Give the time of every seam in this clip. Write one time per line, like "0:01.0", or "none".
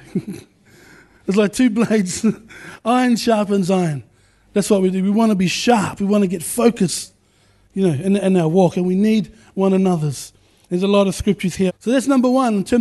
0:10.6
0:11.7